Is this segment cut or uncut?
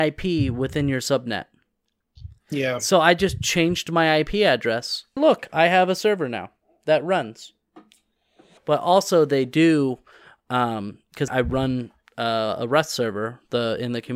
cut